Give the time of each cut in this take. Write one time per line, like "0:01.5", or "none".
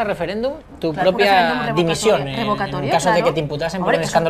none